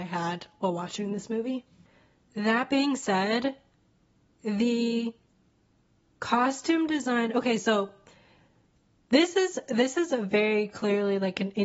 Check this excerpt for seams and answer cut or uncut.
uncut